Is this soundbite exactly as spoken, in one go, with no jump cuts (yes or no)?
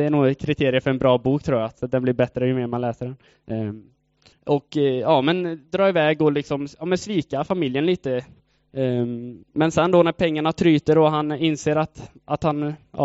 no